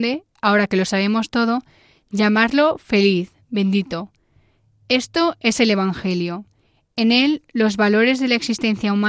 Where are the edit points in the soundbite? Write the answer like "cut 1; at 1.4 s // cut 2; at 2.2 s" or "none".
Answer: none